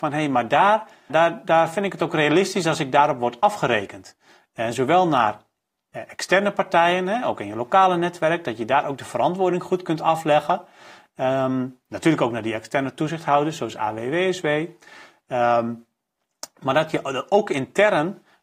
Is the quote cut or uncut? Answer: cut